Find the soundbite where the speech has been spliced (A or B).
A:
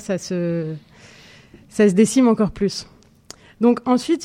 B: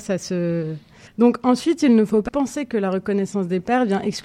B